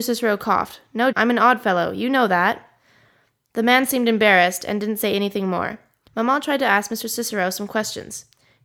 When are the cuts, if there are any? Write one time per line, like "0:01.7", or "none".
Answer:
0:01.1
0:06.1